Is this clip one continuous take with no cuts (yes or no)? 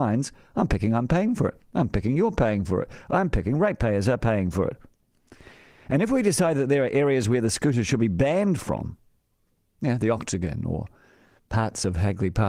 yes